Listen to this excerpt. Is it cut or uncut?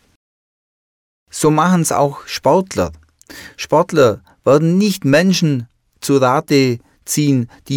uncut